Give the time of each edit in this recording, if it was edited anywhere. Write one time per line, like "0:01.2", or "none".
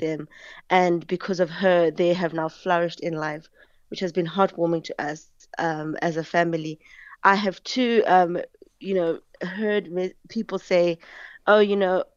none